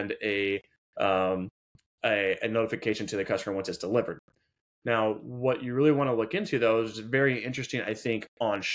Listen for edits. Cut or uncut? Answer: uncut